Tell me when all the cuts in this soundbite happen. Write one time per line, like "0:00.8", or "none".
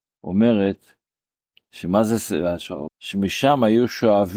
0:02.9